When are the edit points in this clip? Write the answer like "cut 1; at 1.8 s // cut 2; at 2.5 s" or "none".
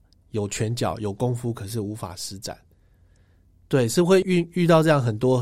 cut 1; at 4.2 s